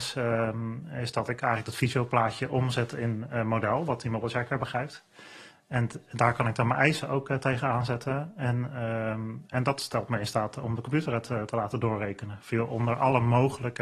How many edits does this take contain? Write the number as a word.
zero